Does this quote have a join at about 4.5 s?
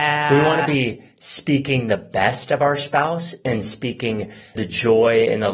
yes; 1 cut; at 4.5 s

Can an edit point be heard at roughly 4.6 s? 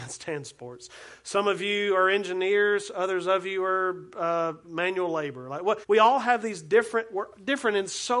yes; 2 cuts; at 4.6 s, 5.8 s

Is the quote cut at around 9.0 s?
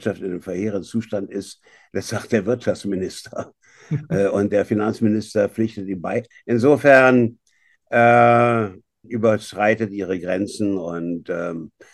yes; 2 cuts; at 6.3 s, 9.0 s

